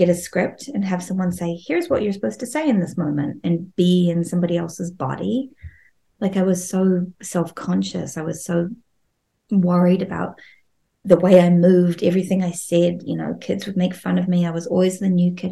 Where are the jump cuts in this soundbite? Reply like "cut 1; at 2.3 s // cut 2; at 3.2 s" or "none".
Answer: none